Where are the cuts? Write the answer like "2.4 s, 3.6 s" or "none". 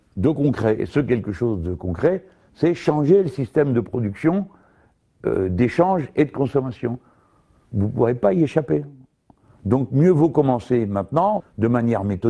11.4 s

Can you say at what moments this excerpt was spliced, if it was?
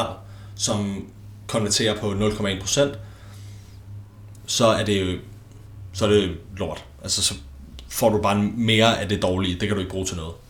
none

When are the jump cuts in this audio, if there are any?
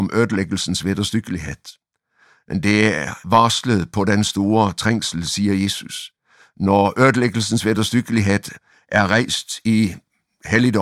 3.2 s

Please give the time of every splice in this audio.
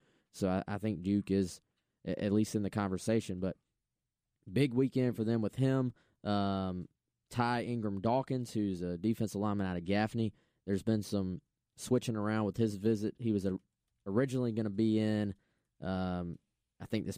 none

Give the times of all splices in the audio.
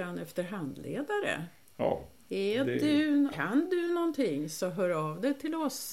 3.3 s

